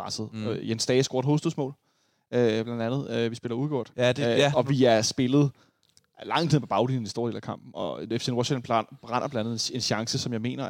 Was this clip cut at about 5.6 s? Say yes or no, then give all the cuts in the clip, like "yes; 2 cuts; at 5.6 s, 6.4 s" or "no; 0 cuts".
no; 0 cuts